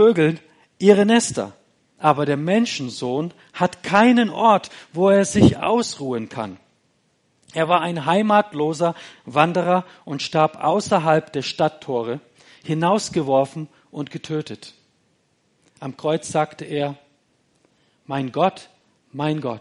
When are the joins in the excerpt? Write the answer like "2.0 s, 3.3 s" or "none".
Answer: none